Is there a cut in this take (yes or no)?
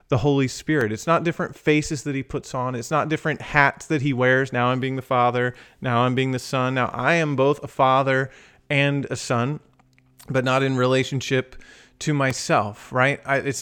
no